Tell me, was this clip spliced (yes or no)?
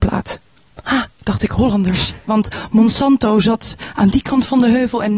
yes